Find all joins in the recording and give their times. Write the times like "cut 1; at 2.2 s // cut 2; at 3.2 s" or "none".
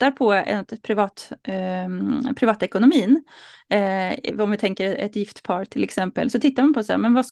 none